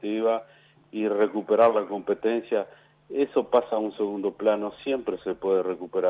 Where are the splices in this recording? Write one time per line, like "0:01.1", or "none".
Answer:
none